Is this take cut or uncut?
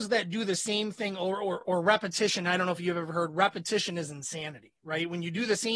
uncut